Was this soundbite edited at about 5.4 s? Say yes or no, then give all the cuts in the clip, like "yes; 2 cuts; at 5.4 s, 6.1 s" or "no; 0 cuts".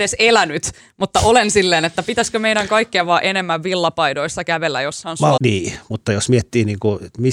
yes; 1 cut; at 5.4 s